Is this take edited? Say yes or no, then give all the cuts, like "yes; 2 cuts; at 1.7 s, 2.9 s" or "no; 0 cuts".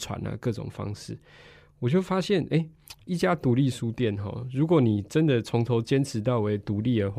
no; 0 cuts